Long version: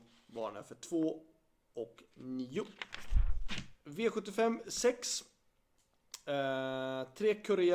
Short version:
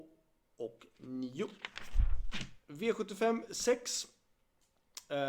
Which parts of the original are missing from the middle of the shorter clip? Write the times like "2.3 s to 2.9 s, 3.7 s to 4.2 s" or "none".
none